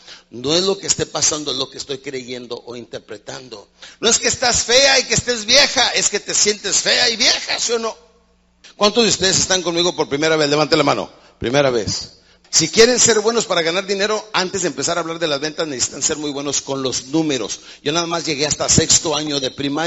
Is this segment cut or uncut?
uncut